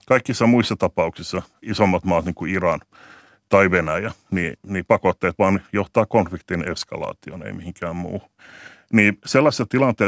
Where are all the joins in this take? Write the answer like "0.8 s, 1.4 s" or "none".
none